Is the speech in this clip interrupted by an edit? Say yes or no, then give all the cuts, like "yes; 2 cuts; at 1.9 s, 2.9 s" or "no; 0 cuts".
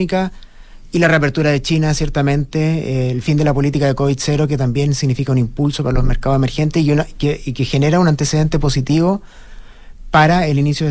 no; 0 cuts